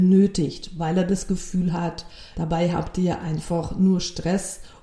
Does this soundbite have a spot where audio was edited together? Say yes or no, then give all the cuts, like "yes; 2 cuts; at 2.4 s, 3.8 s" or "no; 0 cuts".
yes; 1 cut; at 2.3 s